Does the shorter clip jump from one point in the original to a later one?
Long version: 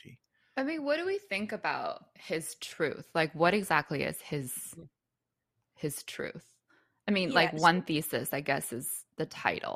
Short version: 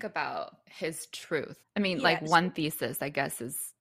yes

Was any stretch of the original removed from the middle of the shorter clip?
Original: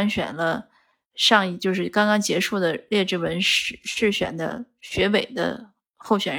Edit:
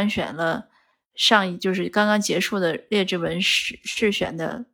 no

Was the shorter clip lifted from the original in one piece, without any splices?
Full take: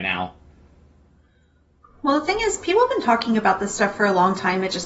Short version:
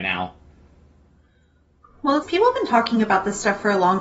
no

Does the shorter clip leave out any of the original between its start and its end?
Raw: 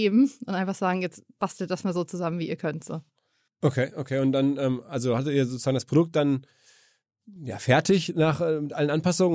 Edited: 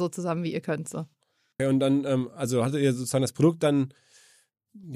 yes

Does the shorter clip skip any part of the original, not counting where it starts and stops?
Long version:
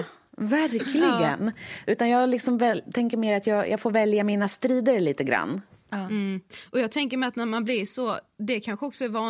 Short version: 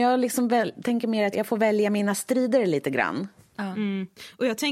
yes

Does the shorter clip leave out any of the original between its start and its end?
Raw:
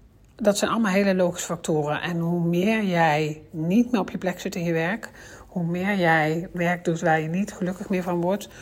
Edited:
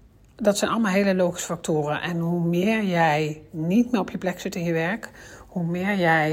no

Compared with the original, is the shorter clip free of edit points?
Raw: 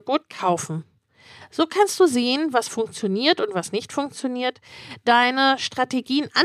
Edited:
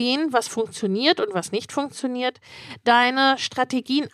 yes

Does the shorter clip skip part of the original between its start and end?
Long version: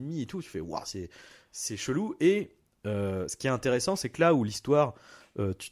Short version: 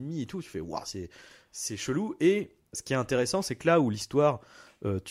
yes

